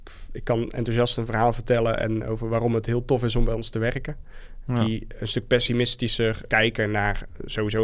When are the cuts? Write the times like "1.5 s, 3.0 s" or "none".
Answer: 4.7 s, 6.5 s